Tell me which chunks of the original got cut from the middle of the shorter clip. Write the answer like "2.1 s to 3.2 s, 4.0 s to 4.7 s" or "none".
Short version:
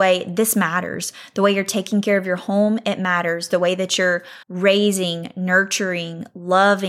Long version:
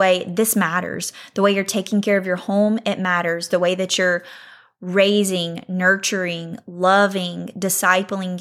4.4 s to 4.7 s